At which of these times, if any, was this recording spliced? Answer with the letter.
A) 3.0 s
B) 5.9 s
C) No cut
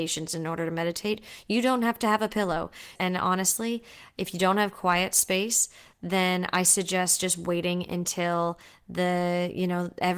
A